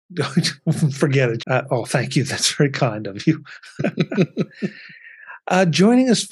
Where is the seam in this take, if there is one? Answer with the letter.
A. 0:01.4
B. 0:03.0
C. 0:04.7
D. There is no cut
A